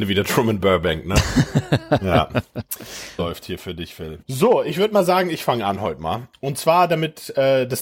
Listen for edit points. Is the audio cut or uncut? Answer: cut